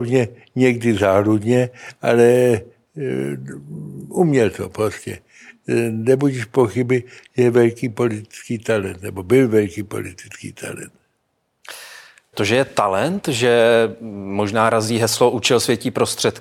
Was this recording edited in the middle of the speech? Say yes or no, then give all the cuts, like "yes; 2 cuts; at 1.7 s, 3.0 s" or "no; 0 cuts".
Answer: yes; 1 cut; at 12.3 s